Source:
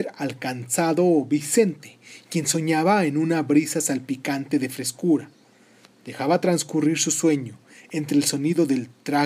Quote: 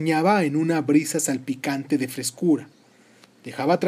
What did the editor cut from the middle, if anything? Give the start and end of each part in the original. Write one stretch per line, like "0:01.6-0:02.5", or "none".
none